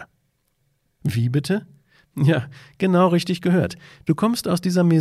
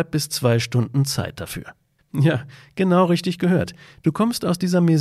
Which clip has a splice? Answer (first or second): second